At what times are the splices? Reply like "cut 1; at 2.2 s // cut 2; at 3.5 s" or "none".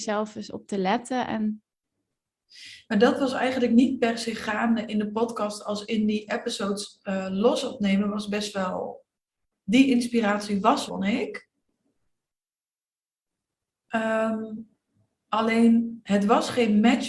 cut 1; at 10.9 s